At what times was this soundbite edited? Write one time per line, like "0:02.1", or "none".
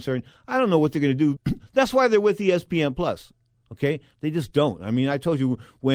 0:01.4
0:03.5